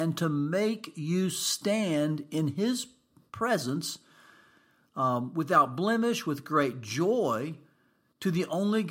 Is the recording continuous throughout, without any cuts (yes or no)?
yes